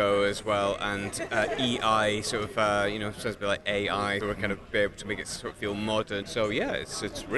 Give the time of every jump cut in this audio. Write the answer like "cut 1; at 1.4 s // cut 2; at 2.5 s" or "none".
cut 1; at 4.2 s // cut 2; at 6.2 s